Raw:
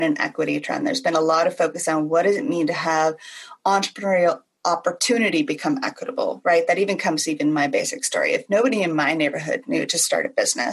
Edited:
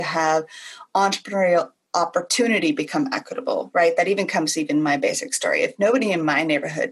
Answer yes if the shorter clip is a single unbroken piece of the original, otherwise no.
yes